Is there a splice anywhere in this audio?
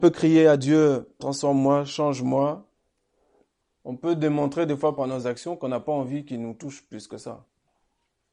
yes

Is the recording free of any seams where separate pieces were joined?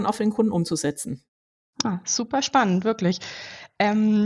yes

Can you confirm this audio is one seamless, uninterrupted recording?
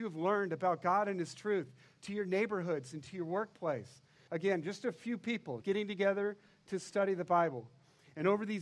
no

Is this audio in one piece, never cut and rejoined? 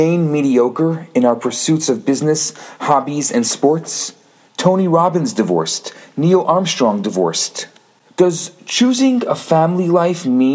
no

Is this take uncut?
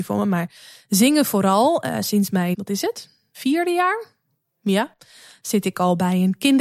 no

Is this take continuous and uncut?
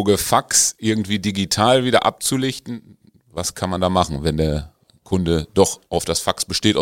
yes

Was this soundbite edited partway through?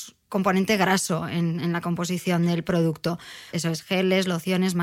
yes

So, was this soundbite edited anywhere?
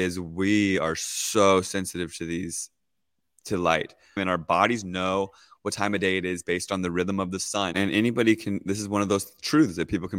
yes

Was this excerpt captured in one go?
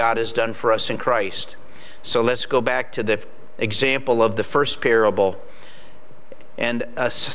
yes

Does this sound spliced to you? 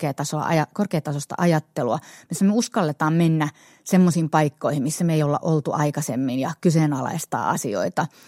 no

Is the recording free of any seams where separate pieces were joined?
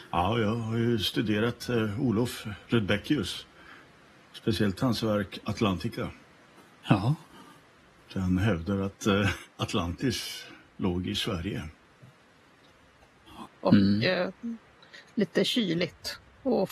no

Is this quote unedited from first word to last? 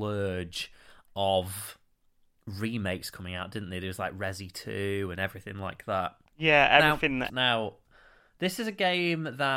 no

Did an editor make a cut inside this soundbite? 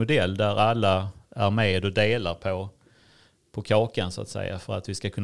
no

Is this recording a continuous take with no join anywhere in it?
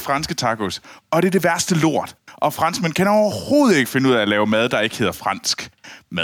yes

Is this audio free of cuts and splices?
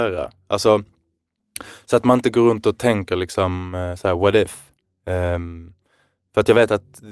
yes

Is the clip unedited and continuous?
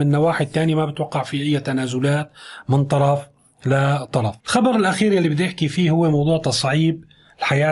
no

